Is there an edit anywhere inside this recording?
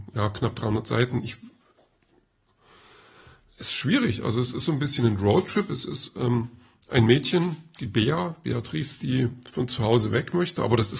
no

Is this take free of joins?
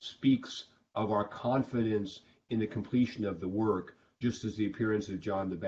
yes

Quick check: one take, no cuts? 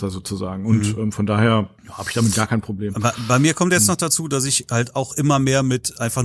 no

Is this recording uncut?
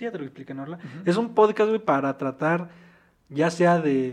yes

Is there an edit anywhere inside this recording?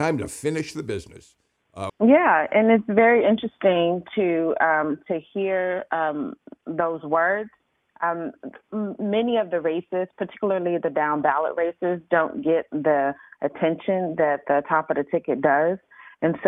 yes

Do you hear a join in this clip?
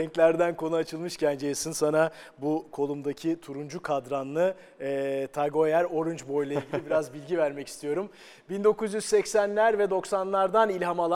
no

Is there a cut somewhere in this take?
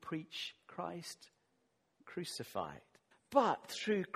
yes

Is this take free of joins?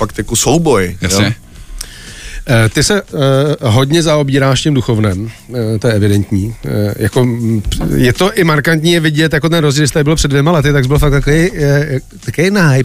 yes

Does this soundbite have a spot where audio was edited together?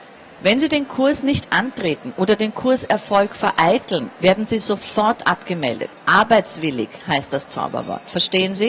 yes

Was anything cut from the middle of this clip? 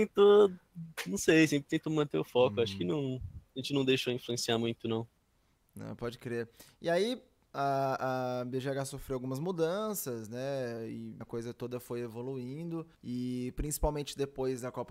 yes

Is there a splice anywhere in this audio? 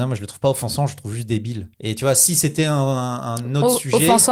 yes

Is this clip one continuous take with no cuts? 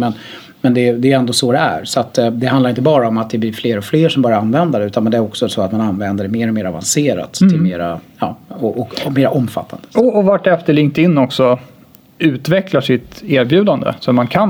yes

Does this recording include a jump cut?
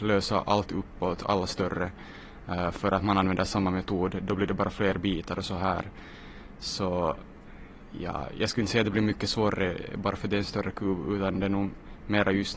no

